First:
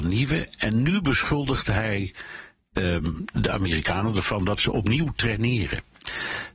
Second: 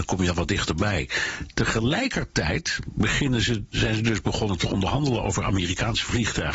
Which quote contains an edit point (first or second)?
second